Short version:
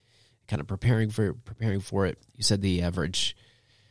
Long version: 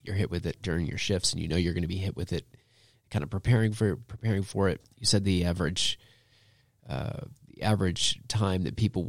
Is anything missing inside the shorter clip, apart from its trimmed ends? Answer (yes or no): no